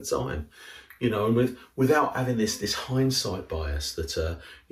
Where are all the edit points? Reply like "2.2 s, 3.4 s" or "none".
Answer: none